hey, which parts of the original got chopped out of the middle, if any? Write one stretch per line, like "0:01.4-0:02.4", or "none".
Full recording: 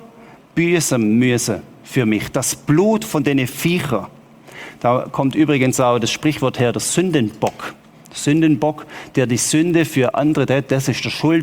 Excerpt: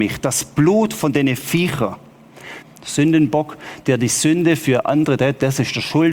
0:04.7-0:07.9